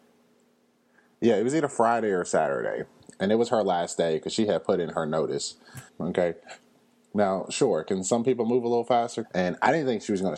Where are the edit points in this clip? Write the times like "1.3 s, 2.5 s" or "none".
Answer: 5.9 s, 9.2 s